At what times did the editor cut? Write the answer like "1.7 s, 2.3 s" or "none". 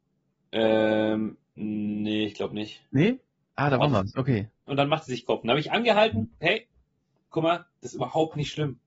4.7 s, 6.4 s